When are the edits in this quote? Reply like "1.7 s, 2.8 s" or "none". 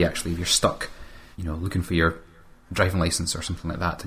1.3 s